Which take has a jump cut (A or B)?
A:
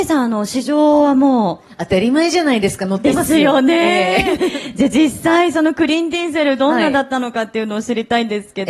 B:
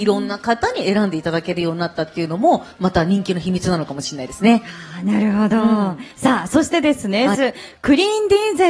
B